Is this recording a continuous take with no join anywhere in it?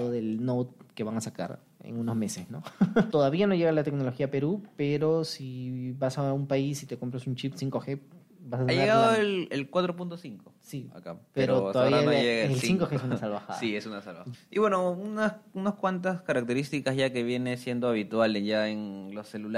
no; 2 cuts; at 3.1 s, 14.3 s

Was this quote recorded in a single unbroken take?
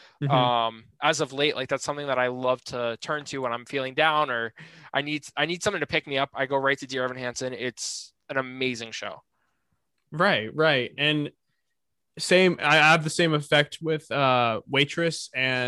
yes; 0 cuts

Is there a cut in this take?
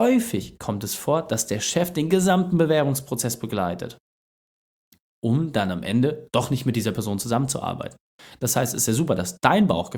no; 0 cuts

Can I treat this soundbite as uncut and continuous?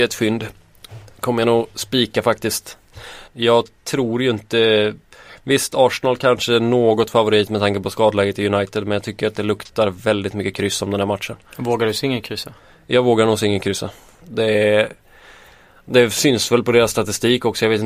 no; 2 cuts; at 3.3 s, 14.2 s

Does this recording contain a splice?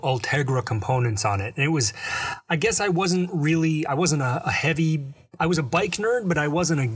no; 0 cuts

